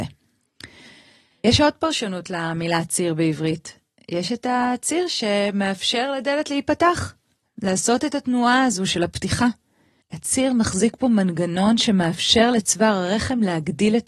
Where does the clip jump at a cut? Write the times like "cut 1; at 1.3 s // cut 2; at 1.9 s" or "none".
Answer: none